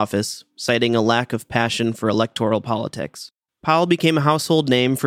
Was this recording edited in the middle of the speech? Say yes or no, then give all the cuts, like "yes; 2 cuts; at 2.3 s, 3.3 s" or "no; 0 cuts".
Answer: yes; 1 cut; at 3.5 s